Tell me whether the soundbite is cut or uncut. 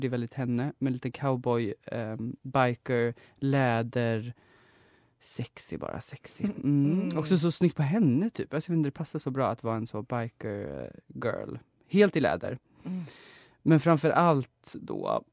uncut